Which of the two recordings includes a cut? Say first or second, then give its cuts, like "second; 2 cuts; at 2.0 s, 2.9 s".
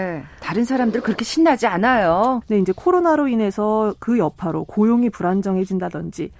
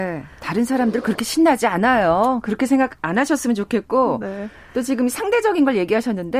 first; 1 cut; at 2.4 s